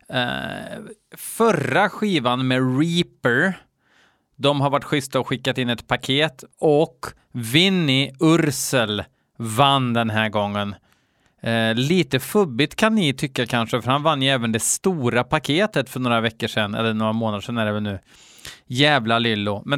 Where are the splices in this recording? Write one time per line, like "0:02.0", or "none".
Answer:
0:06.5